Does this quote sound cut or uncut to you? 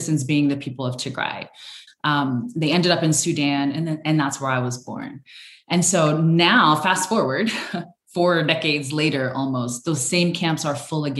cut